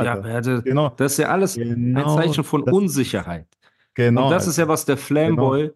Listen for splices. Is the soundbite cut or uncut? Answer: uncut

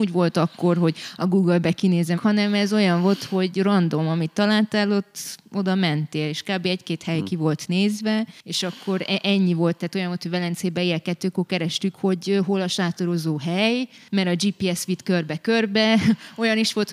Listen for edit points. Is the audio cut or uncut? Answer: cut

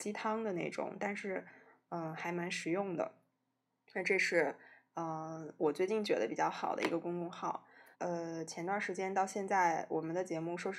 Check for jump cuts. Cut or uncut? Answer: cut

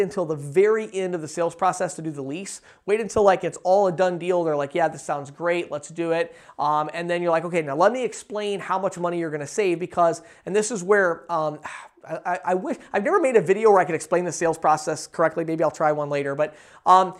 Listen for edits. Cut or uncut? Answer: uncut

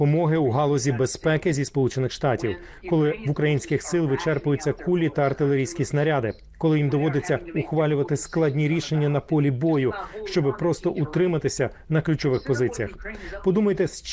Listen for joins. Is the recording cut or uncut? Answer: uncut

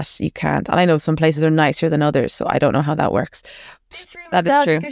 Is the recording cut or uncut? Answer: cut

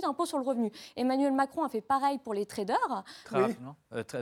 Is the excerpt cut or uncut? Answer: cut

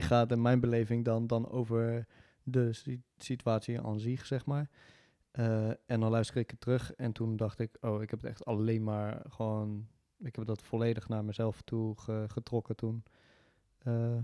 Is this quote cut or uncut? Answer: uncut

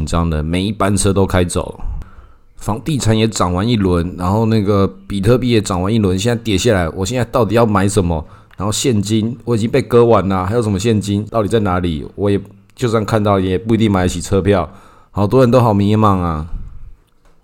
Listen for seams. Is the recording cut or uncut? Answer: cut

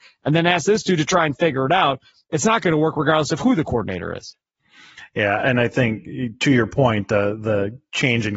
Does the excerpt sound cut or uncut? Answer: uncut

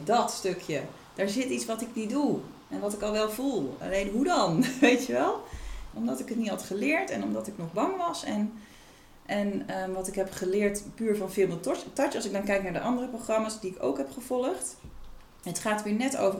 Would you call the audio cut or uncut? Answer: cut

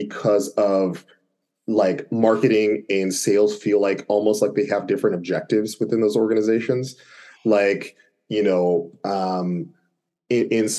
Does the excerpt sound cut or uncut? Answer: uncut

